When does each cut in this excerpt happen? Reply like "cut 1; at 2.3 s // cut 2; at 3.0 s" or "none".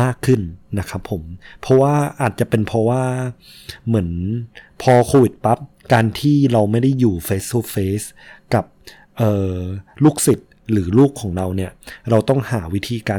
none